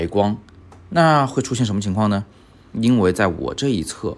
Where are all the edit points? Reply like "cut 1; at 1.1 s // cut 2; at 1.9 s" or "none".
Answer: cut 1; at 2.7 s